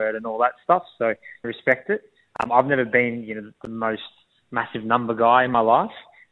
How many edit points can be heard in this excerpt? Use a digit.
1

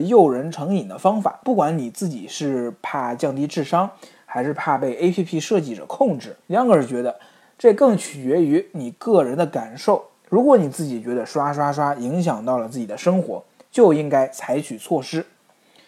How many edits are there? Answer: 1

